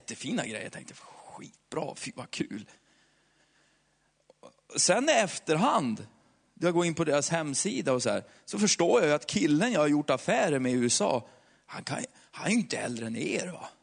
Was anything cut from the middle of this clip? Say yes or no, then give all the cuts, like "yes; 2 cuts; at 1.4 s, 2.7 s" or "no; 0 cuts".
no; 0 cuts